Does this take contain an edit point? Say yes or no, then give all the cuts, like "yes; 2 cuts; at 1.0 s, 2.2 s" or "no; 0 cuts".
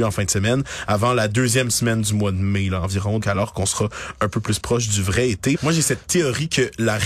yes; 2 cuts; at 3.2 s, 5.5 s